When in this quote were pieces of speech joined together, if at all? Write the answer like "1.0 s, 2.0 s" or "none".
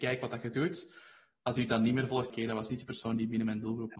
2.3 s